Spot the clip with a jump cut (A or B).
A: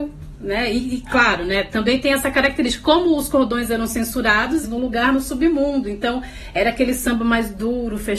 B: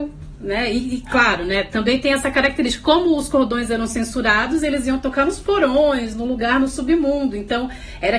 A